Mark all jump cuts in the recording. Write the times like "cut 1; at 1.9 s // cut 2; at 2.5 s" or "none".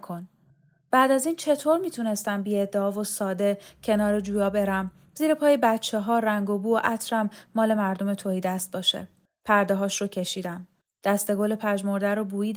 cut 1; at 9.3 s